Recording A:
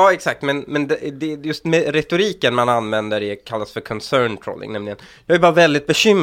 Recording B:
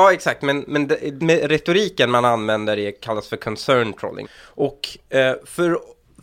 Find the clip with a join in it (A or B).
B